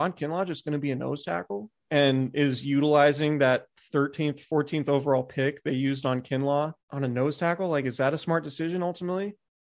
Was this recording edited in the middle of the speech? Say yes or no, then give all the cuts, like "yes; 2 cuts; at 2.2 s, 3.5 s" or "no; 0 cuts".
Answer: yes; 2 cuts; at 1.8 s, 6.8 s